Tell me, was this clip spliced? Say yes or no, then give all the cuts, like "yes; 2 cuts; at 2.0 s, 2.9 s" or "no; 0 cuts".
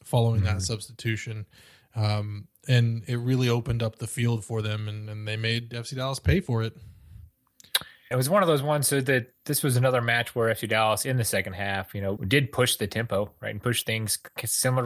yes; 2 cuts; at 8.1 s, 12.2 s